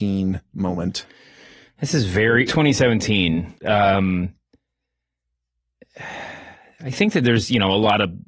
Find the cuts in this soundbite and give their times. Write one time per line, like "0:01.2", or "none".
0:02.5
0:03.6